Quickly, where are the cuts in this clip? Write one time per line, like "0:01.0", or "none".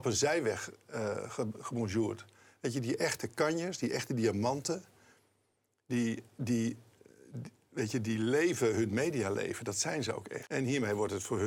0:10.4